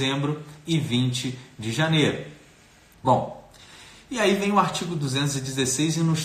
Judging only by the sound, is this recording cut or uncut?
cut